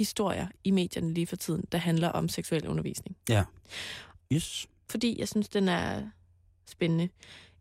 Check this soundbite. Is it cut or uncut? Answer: cut